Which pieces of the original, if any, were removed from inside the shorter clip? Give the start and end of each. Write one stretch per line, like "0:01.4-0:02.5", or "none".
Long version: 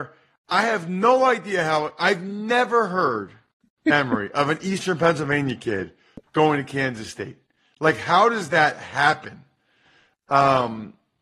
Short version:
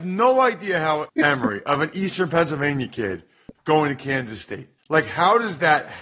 0:01.9-0:03.8
0:07.5-0:07.7